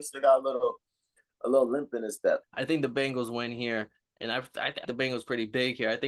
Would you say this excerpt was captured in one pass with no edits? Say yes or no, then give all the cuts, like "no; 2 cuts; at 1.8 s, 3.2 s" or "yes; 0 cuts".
no; 2 cuts; at 2.4 s, 4.8 s